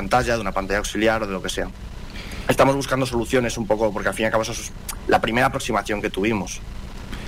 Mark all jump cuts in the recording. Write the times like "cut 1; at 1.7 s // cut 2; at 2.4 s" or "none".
none